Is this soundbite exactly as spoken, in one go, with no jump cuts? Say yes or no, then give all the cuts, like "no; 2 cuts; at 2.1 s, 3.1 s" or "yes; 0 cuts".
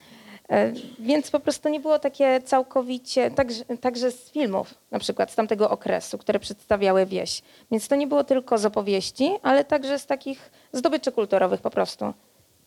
yes; 0 cuts